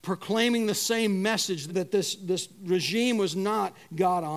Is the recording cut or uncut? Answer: cut